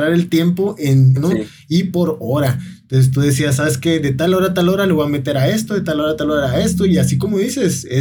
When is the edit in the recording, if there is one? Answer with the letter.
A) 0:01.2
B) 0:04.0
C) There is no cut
A